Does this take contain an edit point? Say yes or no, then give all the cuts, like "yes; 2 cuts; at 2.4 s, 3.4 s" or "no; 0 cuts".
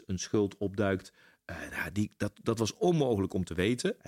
no; 0 cuts